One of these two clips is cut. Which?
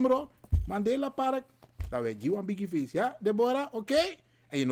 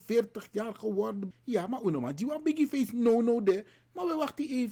second; 1 cut; at 1.3 s

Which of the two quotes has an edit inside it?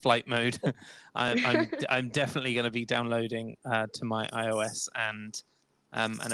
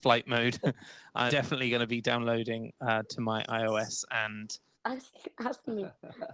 second; 2 cuts; at 1.3 s, 4.7 s

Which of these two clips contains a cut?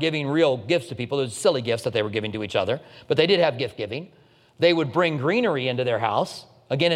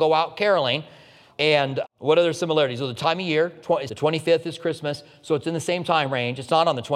second; 1 cut; at 3.9 s

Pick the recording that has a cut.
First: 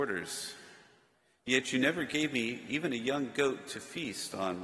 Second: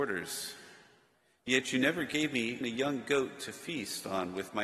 second; 1 cut; at 2.6 s

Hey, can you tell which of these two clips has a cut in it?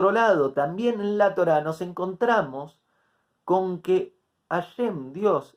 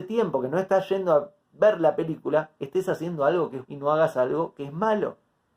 second; 1 cut; at 3.7 s

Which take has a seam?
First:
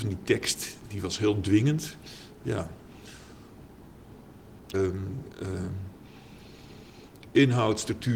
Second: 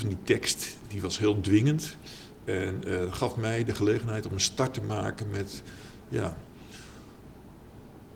first; 2 cuts; at 2.4 s, 4.7 s

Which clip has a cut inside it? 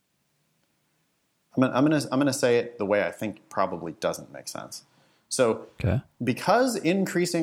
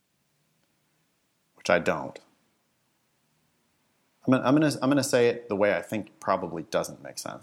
first; 1 cut; at 1.5 s

